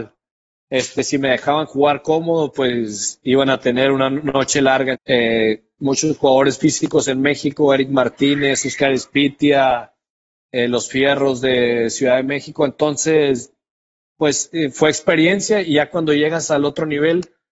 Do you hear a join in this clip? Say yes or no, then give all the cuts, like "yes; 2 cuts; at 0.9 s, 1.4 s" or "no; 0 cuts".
yes; 1 cut; at 4.9 s